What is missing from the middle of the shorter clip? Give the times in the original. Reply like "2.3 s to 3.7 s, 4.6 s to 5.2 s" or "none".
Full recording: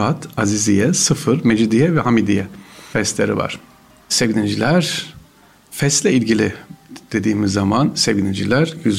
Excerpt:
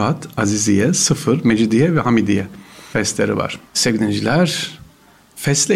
3.7 s to 4.0 s

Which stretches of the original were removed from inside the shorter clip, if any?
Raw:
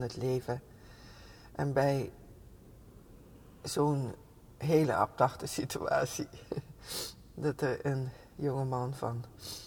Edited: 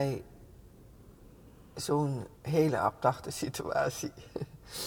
4.2 s to 4.5 s

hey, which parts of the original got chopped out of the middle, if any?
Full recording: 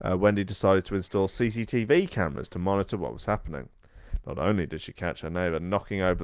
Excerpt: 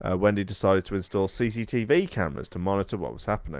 none

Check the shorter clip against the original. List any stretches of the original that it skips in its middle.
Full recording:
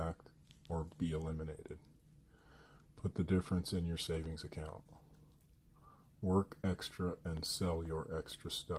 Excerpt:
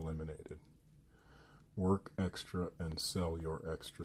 2.9 s to 6.1 s

